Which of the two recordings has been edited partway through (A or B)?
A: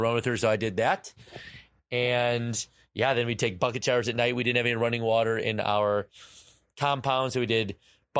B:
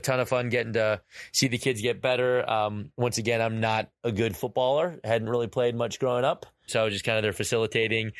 B